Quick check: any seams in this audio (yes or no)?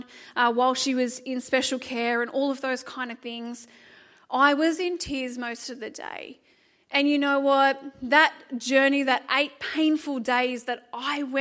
no